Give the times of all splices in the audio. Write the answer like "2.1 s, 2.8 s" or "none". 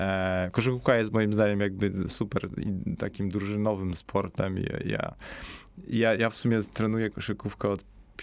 none